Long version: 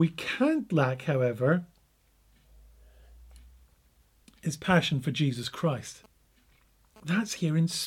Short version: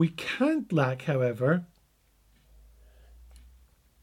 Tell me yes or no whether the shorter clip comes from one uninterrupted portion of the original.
yes